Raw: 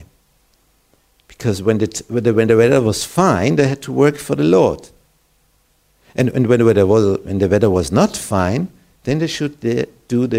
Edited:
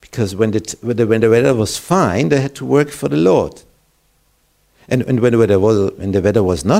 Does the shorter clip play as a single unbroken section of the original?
yes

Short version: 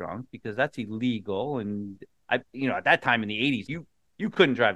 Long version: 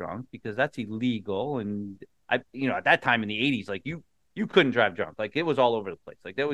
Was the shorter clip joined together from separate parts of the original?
yes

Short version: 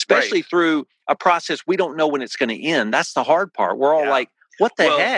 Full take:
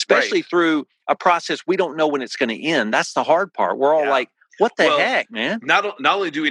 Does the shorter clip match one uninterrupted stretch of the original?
yes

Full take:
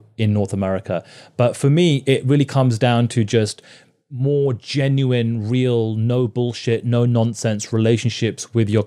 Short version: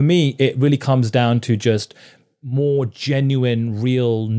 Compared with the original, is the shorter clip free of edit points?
yes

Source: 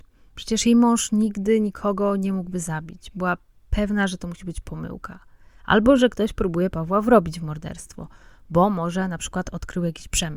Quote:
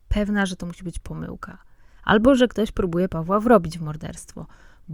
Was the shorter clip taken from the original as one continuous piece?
yes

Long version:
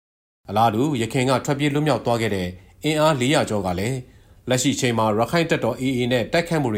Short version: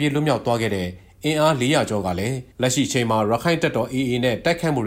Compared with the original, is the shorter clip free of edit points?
no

